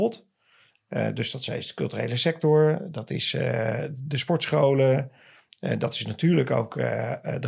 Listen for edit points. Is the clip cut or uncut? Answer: uncut